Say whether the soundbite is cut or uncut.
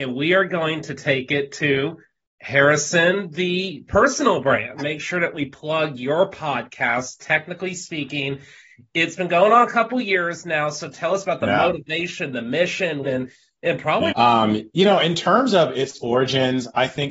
cut